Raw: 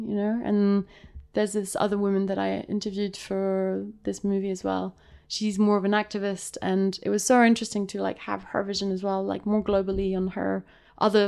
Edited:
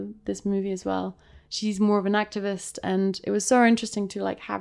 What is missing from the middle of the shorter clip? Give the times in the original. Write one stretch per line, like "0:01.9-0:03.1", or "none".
none